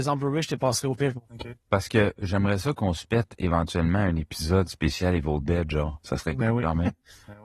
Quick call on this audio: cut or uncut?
uncut